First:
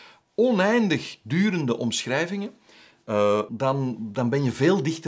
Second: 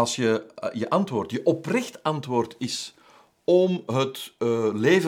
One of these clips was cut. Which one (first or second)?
first